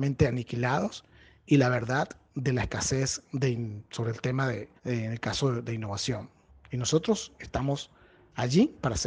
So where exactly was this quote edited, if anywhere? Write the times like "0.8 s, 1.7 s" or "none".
4.8 s, 6.5 s